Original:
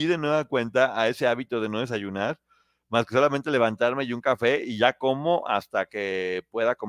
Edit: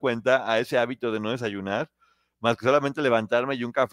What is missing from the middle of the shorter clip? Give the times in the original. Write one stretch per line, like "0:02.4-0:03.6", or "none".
none